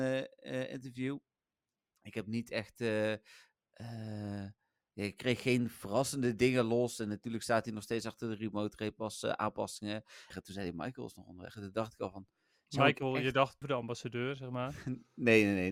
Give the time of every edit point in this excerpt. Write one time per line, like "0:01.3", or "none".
0:10.3
0:13.6